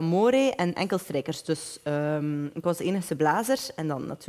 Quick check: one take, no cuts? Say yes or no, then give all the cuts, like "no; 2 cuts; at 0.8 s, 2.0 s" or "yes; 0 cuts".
yes; 0 cuts